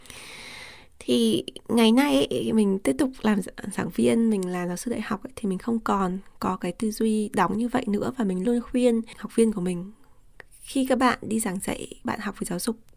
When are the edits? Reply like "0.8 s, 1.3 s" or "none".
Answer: 8.4 s